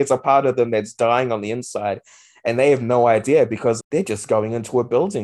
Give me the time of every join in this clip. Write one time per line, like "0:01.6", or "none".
0:03.8